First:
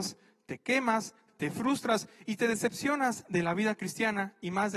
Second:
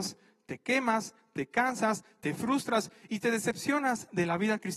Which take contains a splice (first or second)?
first